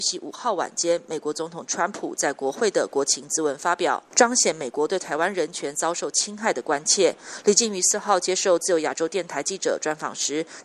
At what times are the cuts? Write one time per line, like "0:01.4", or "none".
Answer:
0:07.4